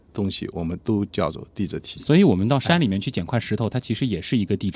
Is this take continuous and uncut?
yes; 0 cuts

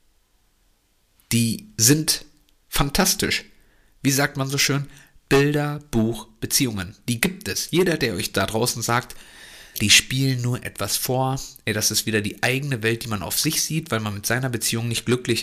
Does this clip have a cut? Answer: yes; 1 cut; at 9.7 s

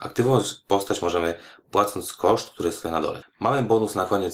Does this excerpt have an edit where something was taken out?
yes; 1 cut; at 3.2 s

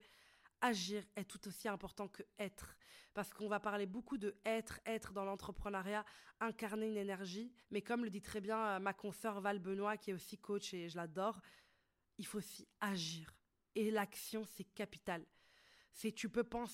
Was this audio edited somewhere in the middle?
yes; 2 cuts; at 4.8 s, 7.6 s

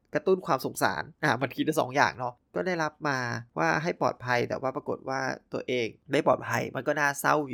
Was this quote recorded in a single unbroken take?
no; 1 cut; at 1.1 s

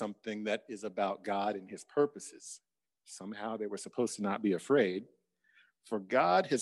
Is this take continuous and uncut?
no; 1 cut; at 2.8 s

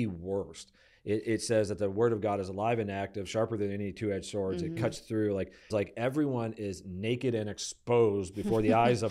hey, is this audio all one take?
no; 1 cut; at 5.7 s

